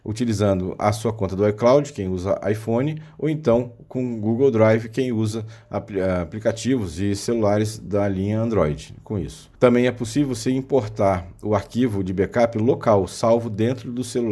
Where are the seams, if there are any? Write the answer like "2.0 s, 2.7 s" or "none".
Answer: 9.5 s